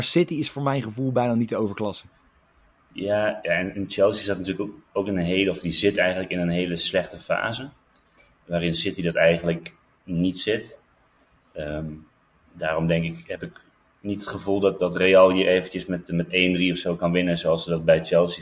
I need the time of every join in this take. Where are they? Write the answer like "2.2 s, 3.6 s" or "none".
none